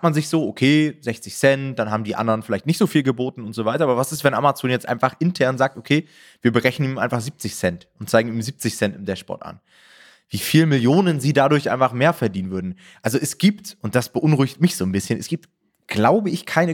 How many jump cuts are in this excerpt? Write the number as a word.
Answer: zero